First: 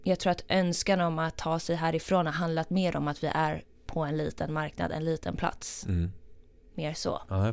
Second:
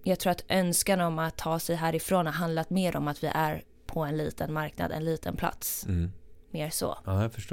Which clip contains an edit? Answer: second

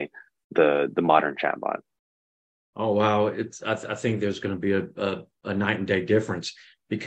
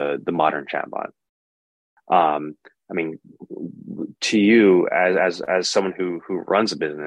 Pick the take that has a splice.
second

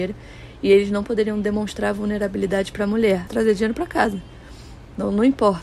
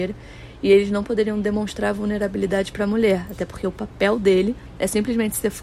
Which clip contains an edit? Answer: first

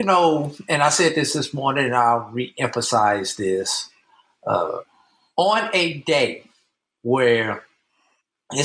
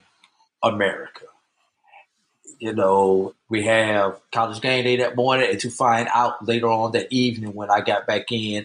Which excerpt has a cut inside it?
second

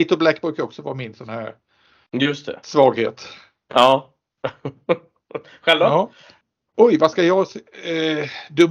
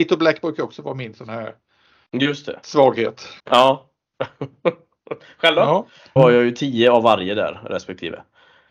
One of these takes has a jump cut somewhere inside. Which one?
second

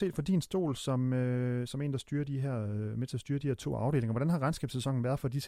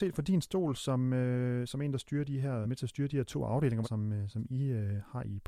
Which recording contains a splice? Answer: second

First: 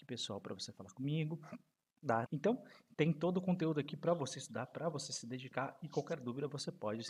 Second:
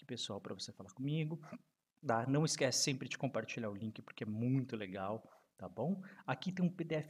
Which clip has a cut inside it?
first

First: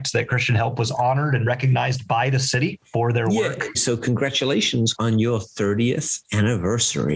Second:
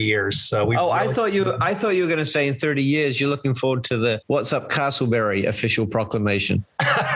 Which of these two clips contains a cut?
first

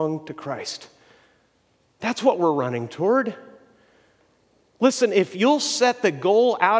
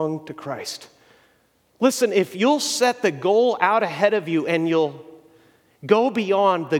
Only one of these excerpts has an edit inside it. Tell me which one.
second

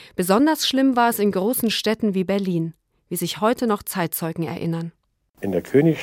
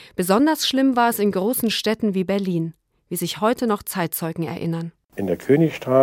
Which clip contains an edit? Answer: second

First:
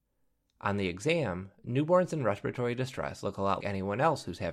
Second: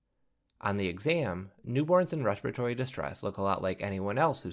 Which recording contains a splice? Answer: first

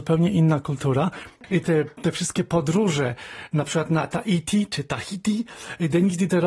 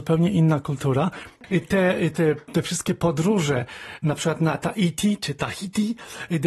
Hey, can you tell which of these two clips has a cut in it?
first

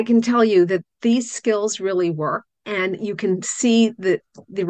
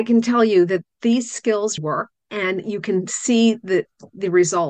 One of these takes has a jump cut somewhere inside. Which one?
second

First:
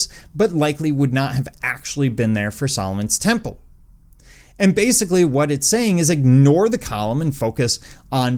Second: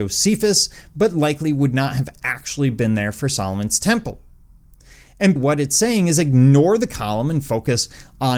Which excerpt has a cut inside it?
second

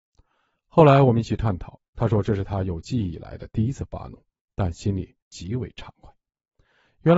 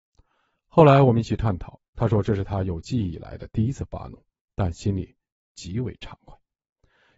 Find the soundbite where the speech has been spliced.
first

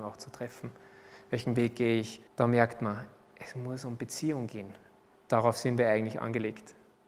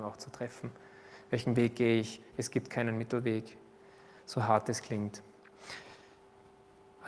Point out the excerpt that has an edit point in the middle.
first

